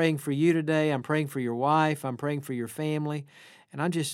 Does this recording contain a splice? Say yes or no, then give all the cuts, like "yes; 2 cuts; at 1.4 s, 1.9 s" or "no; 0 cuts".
no; 0 cuts